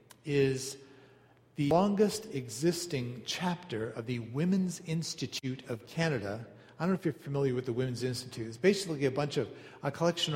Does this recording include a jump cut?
no; 0 cuts

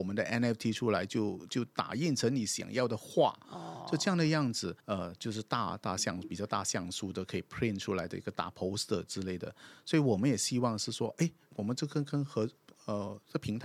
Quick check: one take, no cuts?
no; 1 cut; at 4.8 s

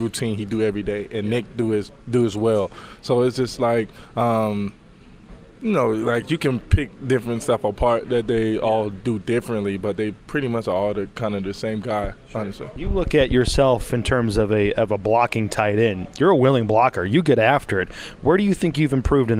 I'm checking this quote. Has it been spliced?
no; 0 cuts

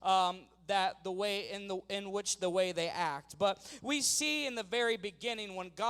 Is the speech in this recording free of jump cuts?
yes; 0 cuts

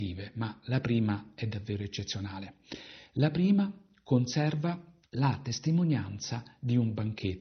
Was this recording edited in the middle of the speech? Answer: no; 0 cuts

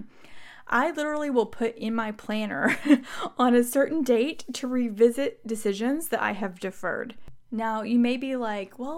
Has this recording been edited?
no; 0 cuts

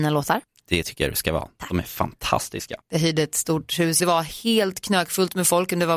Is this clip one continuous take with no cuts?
no; 2 cuts; at 2.8 s, 4.0 s

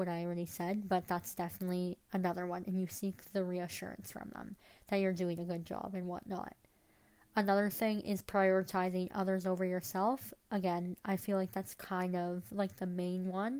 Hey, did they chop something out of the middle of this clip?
no; 0 cuts

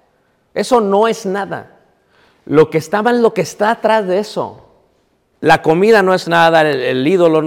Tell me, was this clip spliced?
yes; 1 cut; at 5.3 s

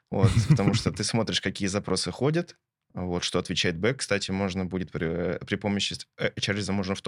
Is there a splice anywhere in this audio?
no; 0 cuts

